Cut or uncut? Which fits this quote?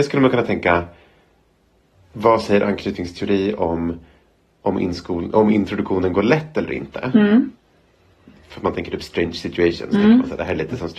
uncut